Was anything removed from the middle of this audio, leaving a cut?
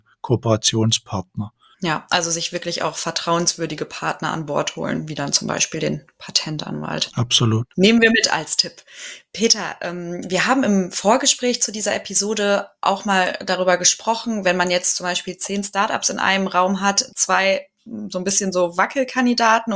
yes; 1 cut; at 17.1 s

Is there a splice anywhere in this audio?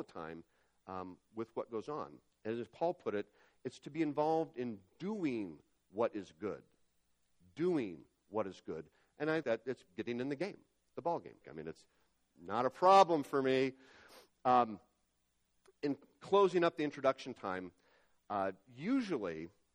yes; 2 cuts; at 9.4 s, 11.4 s

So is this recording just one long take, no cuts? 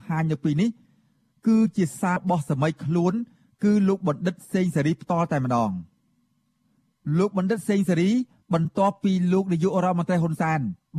no; 1 cut; at 2.2 s

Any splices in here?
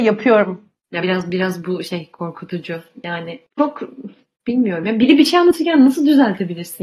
no; 0 cuts

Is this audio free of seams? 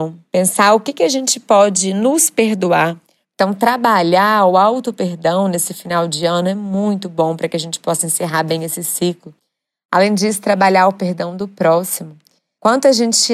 no; 1 cut; at 3.2 s

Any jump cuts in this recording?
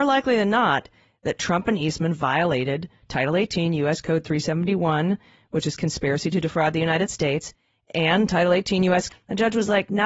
yes; 1 cut; at 9.1 s

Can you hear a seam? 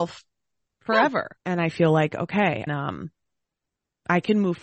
yes; 2 cuts; at 1.4 s, 2.7 s

